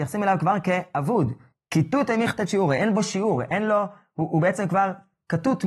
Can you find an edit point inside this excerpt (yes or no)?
no